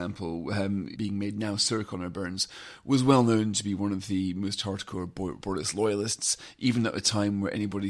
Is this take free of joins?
no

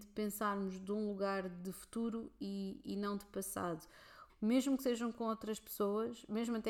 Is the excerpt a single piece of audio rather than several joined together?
no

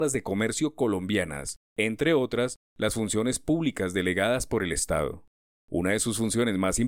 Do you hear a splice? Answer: no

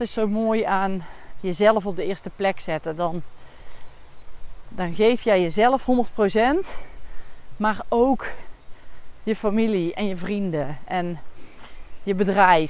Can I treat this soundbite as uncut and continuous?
yes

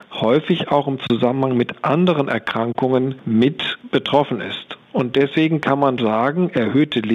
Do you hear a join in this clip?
yes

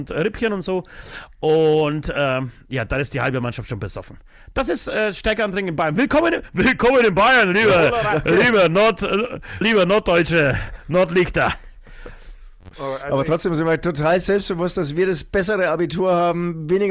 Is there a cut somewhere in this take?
yes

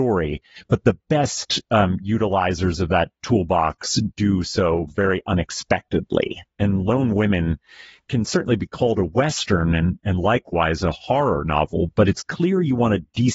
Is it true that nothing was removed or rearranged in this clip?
yes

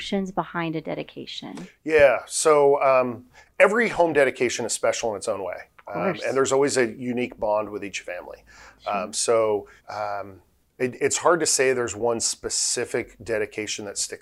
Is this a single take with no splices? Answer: no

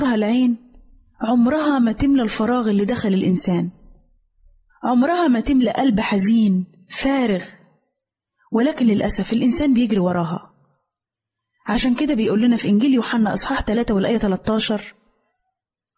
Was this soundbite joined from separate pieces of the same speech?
no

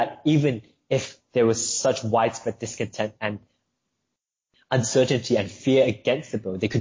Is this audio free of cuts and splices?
yes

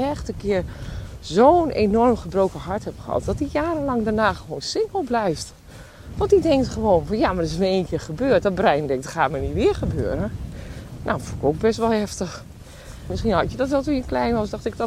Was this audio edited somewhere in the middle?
yes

